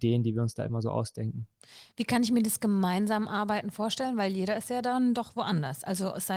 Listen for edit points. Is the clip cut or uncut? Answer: uncut